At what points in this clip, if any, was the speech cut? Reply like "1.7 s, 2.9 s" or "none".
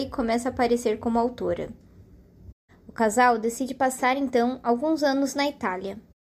2.7 s